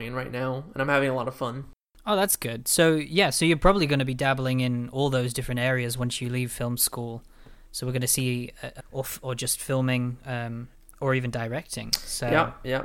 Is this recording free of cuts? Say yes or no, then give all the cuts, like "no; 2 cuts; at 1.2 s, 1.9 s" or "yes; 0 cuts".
no; 2 cuts; at 2.0 s, 8.8 s